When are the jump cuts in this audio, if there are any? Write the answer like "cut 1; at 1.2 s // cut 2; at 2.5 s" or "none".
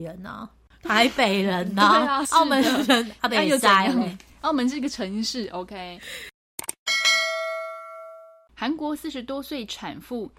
cut 1; at 2.2 s